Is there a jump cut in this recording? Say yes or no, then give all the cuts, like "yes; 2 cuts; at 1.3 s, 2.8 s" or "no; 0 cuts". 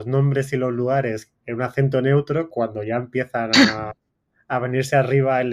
no; 0 cuts